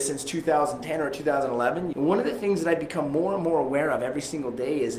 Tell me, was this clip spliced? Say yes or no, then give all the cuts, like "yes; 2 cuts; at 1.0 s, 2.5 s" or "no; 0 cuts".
yes; 1 cut; at 1.9 s